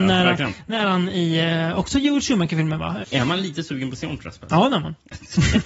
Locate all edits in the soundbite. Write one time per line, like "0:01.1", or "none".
0:03.0